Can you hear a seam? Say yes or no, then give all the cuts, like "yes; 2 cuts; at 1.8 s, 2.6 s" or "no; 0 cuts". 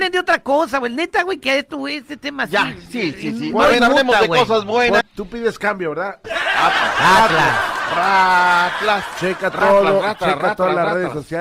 yes; 2 cuts; at 5.0 s, 6.2 s